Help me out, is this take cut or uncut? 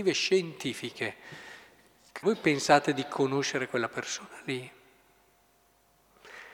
cut